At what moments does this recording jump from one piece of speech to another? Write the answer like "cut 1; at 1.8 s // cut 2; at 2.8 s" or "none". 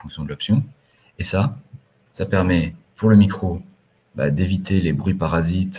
none